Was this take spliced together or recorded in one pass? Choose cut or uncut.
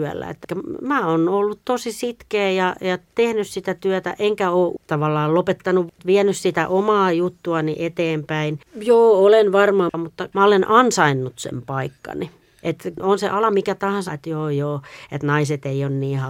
cut